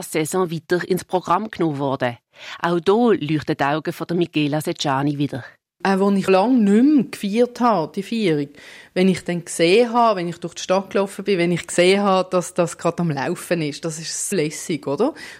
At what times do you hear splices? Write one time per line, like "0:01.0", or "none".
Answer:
0:06.3
0:14.3